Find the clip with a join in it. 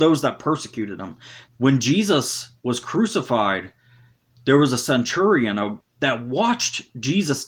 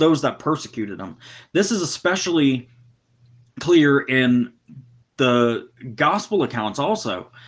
first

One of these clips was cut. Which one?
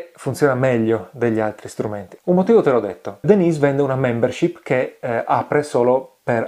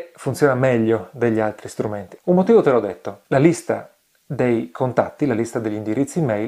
first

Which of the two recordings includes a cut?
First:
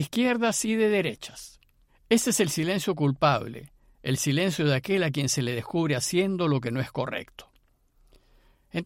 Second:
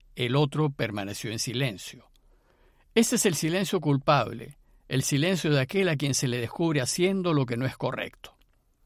first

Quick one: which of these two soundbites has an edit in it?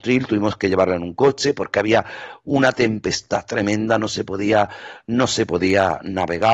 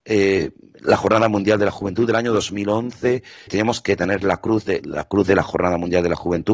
second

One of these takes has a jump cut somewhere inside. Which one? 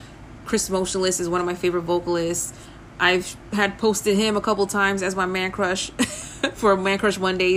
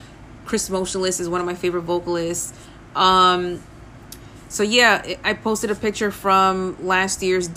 second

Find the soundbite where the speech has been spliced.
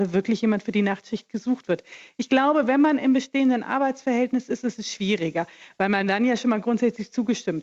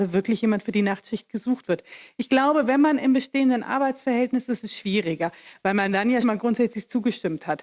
second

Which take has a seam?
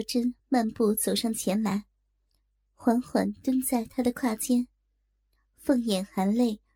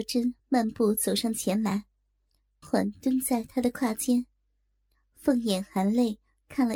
second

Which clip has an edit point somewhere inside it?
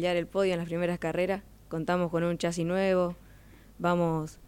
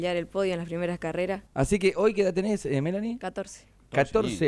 second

